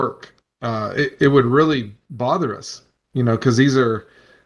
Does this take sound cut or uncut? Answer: uncut